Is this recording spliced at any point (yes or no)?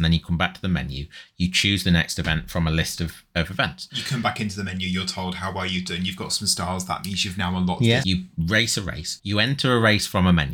yes